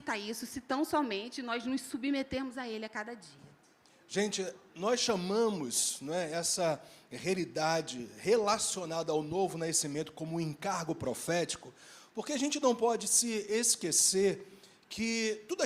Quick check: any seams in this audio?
no; 0 cuts

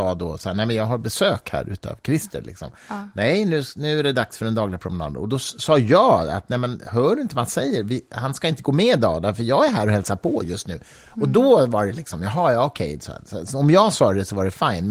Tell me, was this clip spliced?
no; 0 cuts

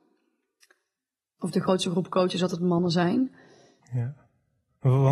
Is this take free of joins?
no; 2 cuts; at 1.4 s, 3.8 s

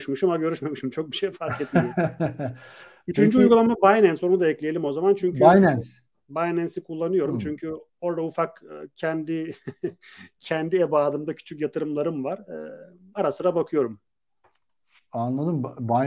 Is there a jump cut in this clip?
no; 0 cuts

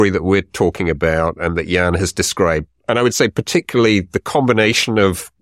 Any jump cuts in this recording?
no; 0 cuts

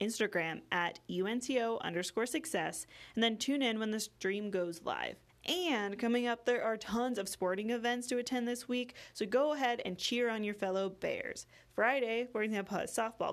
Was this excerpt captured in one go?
no; 1 cut; at 5.3 s

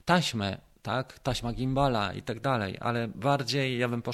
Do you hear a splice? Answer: no; 0 cuts

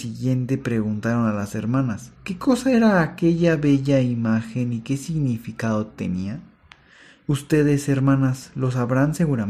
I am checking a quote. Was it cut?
yes; 1 cut; at 2.2 s

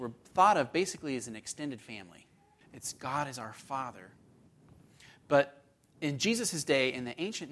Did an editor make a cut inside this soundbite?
yes; 1 cut; at 2.6 s

